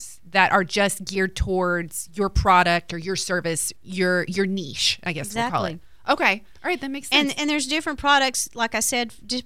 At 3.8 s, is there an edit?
yes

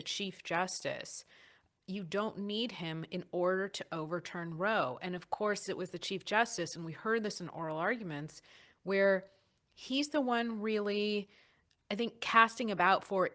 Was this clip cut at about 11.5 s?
no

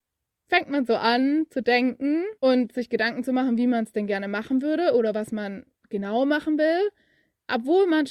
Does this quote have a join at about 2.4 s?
yes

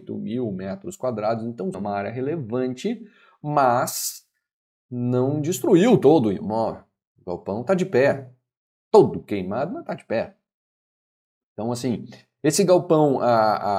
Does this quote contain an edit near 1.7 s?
yes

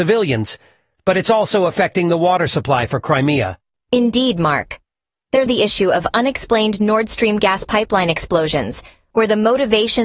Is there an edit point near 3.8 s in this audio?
yes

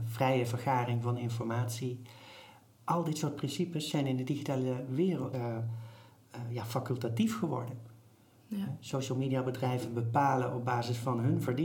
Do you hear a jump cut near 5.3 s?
yes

